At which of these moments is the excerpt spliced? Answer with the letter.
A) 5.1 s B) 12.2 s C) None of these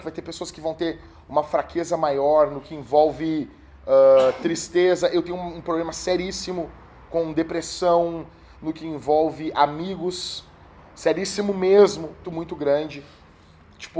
B